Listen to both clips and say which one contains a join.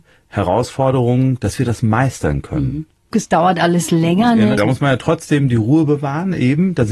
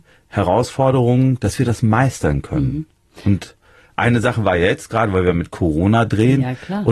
first; 2 cuts; at 3.1 s, 4.6 s

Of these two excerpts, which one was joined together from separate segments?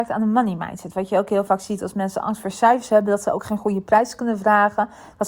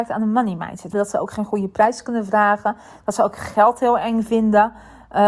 second; 1 cut; at 0.9 s

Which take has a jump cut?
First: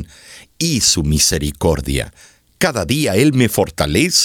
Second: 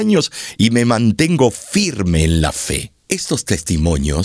second; 1 cut; at 3.0 s

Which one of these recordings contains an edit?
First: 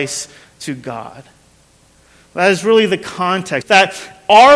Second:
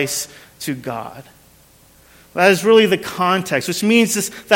first; 1 cut; at 3.6 s

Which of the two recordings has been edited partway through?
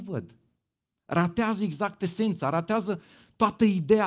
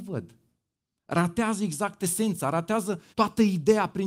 second; 1 cut; at 3.1 s

